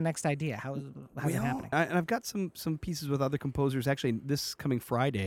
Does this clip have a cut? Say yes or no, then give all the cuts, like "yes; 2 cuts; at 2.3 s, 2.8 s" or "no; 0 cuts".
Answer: yes; 1 cut; at 1.7 s